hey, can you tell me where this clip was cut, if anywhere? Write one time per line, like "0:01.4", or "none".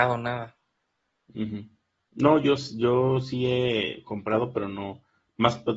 none